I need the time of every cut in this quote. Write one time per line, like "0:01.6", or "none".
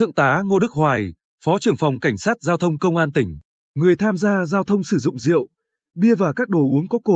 none